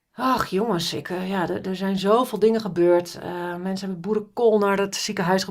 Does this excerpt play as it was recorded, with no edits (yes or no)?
yes